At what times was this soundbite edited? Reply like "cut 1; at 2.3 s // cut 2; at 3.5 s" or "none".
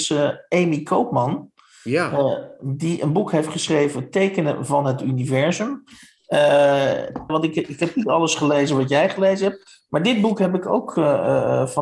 cut 1; at 7.3 s